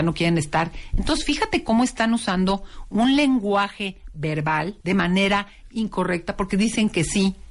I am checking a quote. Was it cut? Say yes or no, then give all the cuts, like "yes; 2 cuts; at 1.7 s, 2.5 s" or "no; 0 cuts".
yes; 1 cut; at 4.8 s